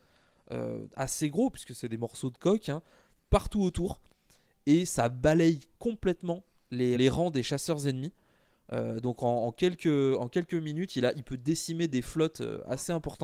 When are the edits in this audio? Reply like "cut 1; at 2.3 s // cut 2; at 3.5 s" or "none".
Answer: cut 1; at 7.0 s